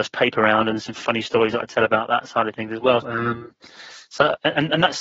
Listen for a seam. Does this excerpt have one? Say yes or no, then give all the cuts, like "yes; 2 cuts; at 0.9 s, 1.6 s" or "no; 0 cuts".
yes; 1 cut; at 3.0 s